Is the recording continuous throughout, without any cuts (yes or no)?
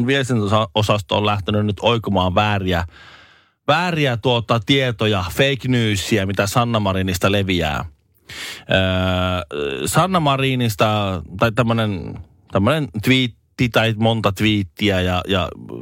yes